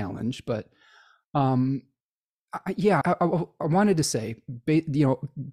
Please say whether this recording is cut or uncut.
cut